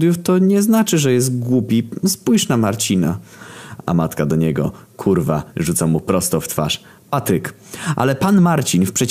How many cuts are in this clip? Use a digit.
1